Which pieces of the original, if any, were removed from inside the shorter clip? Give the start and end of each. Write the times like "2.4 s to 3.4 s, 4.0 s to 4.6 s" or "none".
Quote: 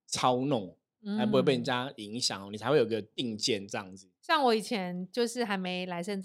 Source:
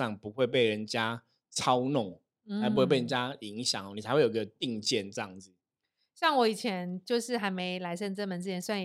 5.6 s to 6.1 s